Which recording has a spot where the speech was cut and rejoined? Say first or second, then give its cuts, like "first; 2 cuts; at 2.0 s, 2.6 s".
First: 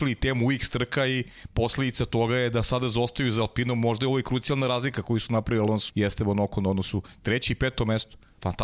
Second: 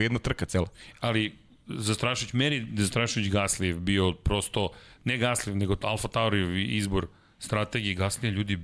first; 1 cut; at 5.9 s